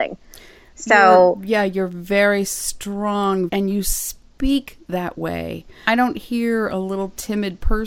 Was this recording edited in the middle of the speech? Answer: yes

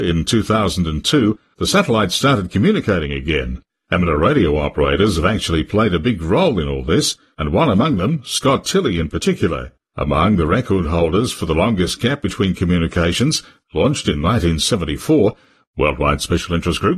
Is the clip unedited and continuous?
no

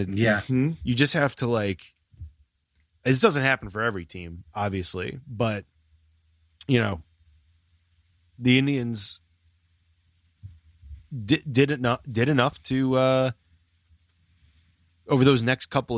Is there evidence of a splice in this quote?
no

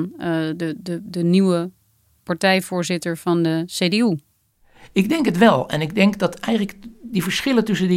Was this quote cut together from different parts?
no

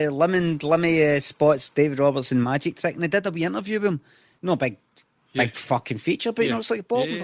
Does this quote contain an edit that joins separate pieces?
no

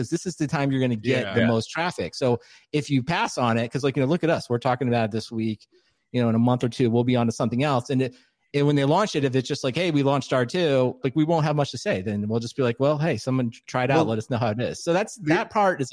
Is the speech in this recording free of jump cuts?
no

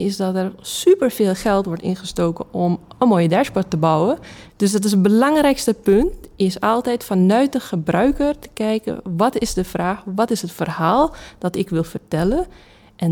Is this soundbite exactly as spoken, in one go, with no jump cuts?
no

